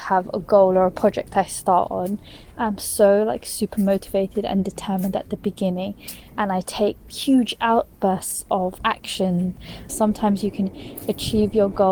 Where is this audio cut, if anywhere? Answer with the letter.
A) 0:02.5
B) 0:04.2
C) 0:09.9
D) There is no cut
C